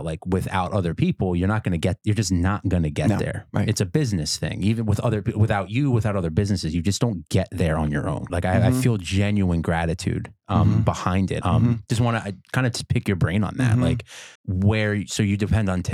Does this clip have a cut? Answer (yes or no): yes